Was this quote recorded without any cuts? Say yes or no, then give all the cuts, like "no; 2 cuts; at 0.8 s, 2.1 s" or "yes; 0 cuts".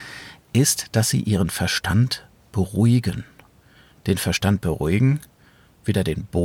no; 1 cut; at 3.9 s